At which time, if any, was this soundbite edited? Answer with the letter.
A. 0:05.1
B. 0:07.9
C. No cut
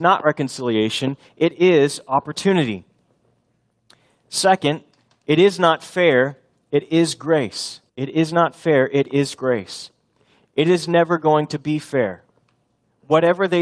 B